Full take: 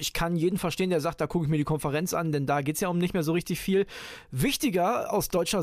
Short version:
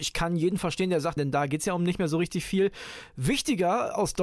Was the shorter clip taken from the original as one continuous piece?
no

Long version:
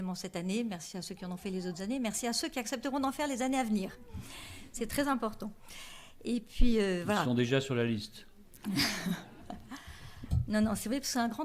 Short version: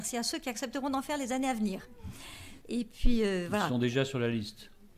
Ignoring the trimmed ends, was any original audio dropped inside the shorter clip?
yes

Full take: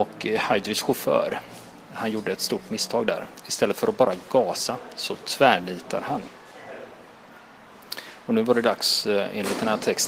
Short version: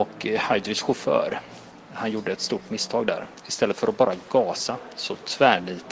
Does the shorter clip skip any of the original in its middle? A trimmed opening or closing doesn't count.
no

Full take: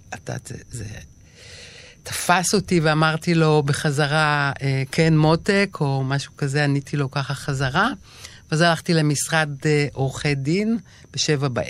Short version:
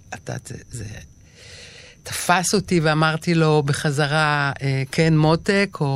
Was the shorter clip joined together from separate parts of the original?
no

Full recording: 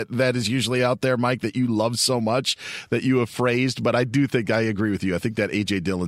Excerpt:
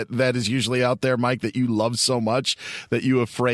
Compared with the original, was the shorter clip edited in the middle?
no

